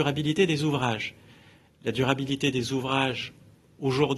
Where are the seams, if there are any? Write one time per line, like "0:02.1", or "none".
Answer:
none